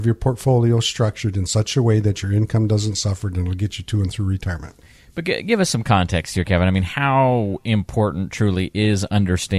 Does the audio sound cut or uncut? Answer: uncut